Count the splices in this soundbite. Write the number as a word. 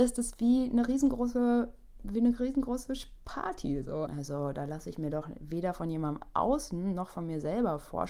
one